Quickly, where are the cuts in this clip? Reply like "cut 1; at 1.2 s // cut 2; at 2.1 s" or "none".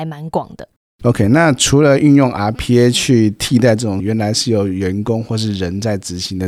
none

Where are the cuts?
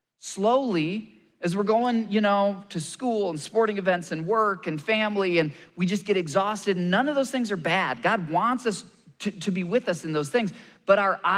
none

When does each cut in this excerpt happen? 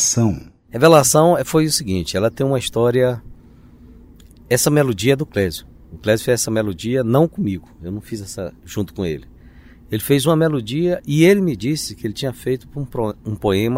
none

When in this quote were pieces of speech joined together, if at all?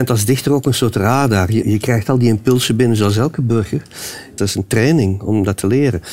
cut 1; at 1.6 s // cut 2; at 4.4 s

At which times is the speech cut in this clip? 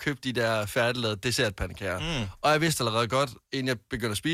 none

